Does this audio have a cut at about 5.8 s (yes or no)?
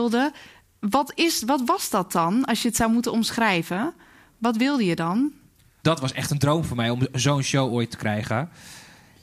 yes